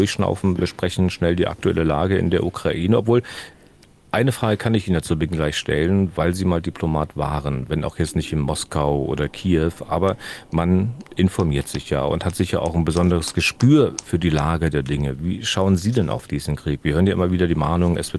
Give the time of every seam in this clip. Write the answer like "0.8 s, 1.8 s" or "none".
none